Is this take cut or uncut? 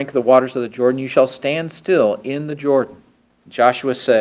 cut